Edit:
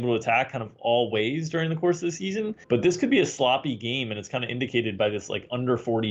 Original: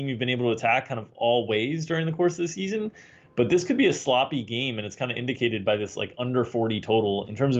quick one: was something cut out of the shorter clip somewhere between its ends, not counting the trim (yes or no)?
yes